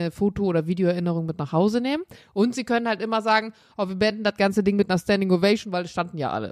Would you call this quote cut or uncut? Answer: uncut